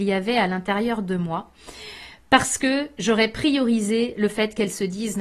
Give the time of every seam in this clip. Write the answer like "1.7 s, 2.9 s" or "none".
none